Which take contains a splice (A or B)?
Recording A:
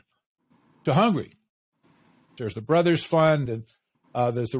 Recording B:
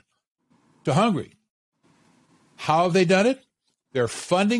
A